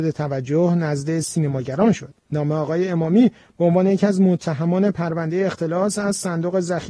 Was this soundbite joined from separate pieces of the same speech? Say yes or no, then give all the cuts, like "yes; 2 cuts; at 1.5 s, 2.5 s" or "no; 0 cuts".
no; 0 cuts